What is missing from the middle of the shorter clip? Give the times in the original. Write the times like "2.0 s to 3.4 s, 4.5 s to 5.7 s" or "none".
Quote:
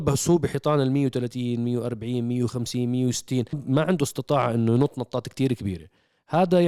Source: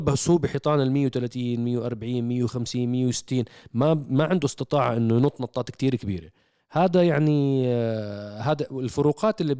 3.5 s to 4.0 s

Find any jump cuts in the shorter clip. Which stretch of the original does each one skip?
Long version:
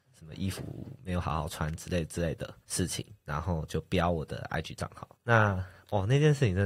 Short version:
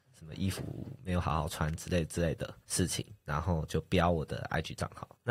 none

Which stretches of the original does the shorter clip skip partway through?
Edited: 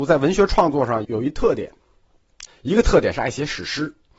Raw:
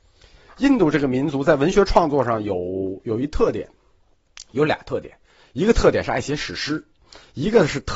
2.4 s to 3.0 s, 4.4 s to 5.4 s

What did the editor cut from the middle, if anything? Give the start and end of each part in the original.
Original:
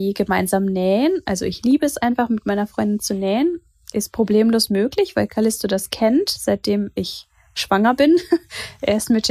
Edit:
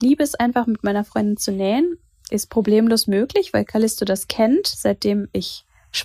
none

